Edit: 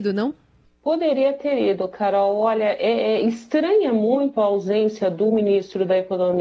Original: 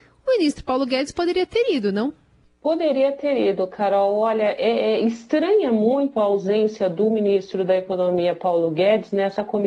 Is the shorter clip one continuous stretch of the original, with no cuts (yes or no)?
yes